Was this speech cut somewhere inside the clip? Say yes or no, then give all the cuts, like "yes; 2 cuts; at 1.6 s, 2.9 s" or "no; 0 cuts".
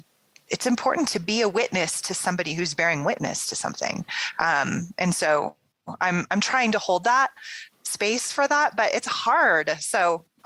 no; 0 cuts